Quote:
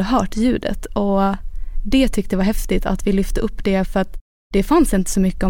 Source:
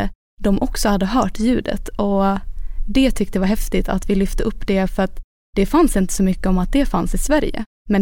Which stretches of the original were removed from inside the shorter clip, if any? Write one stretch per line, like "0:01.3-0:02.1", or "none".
none